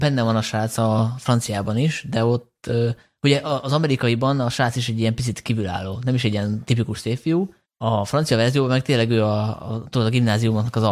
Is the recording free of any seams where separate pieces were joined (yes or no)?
yes